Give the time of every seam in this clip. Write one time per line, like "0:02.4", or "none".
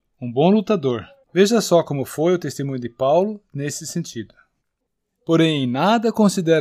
0:01.2